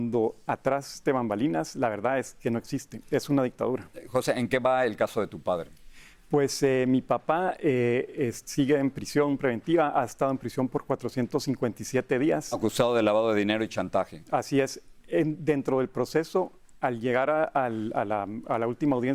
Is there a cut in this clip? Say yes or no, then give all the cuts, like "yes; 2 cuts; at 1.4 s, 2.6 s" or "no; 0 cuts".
no; 0 cuts